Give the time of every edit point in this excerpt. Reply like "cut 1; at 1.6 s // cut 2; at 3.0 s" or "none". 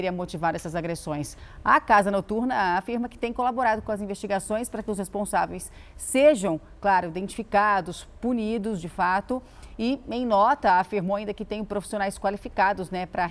none